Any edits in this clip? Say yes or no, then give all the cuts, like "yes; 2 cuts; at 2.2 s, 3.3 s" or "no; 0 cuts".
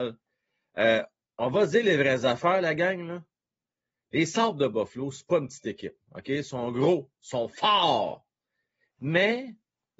no; 0 cuts